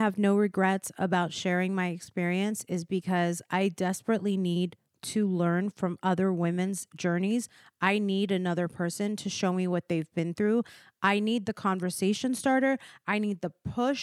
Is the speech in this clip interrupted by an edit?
no; 0 cuts

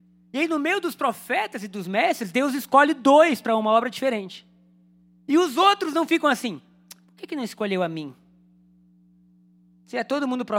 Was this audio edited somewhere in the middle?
no; 0 cuts

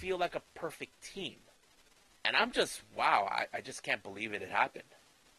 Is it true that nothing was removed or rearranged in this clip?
no; 1 cut; at 2.1 s

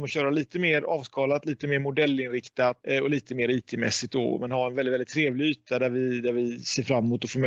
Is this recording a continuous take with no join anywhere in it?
yes; 0 cuts

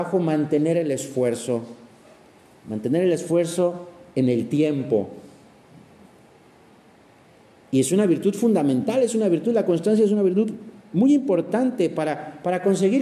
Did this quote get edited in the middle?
no; 0 cuts

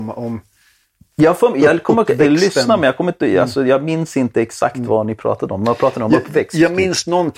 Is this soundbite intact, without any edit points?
yes; 0 cuts

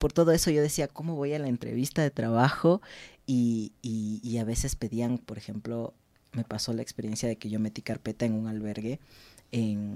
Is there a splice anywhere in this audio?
no; 0 cuts

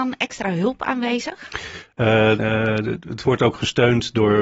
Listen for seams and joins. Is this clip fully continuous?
no; 1 cut; at 2.4 s

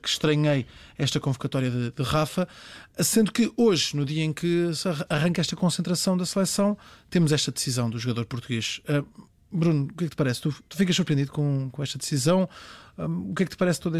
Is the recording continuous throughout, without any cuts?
yes; 0 cuts

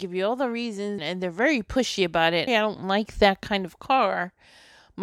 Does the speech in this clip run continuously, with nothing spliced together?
no; 2 cuts; at 1.0 s, 2.5 s

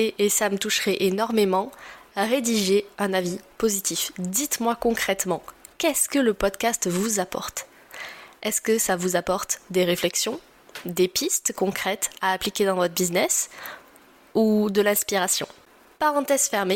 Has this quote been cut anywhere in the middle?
no; 0 cuts

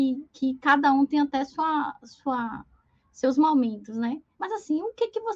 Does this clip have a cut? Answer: yes; 1 cut; at 4.3 s

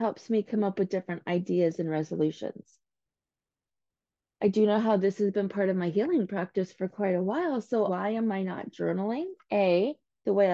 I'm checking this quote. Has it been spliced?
yes; 1 cut; at 7.9 s

